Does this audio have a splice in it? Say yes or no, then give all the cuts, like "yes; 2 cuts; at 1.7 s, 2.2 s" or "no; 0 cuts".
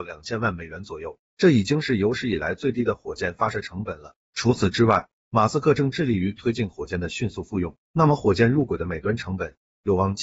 yes; 1 cut; at 7.8 s